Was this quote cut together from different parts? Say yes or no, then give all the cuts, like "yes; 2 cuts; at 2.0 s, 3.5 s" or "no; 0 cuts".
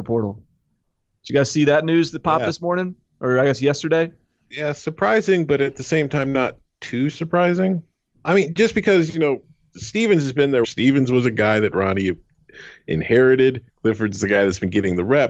yes; 3 cuts; at 8.1 s, 10.6 s, 13.7 s